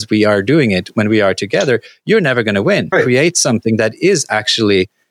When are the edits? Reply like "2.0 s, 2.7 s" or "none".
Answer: 2.9 s